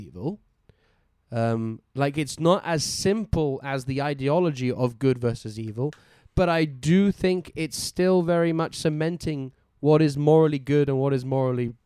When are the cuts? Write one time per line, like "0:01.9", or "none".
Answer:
none